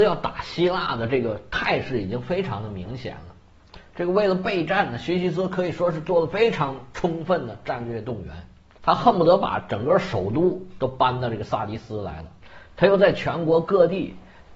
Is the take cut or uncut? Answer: cut